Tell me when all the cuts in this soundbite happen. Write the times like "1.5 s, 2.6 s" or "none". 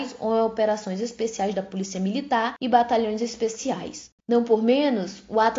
4.2 s